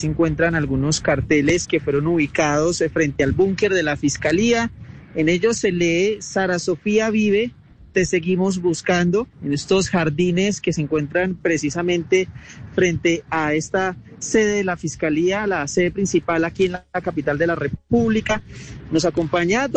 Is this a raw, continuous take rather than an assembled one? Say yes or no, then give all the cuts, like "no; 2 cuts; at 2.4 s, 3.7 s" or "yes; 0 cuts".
no; 1 cut; at 9.3 s